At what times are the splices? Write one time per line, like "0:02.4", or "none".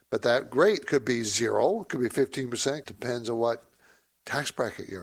0:02.8